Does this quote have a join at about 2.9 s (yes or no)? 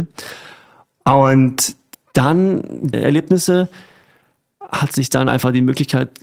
yes